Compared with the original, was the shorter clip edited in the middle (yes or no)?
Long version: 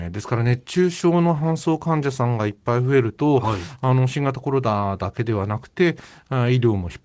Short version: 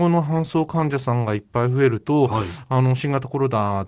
no